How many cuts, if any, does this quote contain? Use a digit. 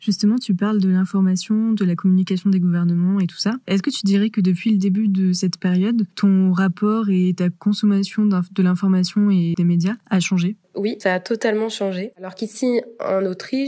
2